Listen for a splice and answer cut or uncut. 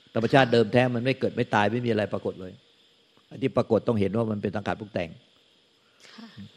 uncut